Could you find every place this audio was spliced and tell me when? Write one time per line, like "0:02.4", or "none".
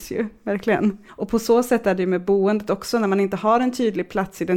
0:01.1